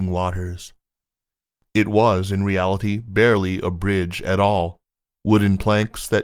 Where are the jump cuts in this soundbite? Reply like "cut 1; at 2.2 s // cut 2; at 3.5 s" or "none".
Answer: none